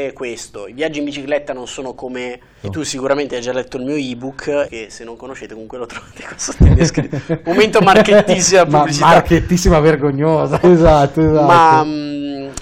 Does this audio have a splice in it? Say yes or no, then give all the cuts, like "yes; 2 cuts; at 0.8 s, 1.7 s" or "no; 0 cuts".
yes; 3 cuts; at 2.6 s, 4.7 s, 10.6 s